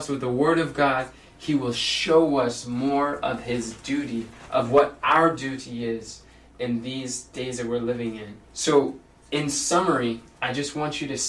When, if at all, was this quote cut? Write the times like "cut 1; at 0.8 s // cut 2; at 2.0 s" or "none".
cut 1; at 8.4 s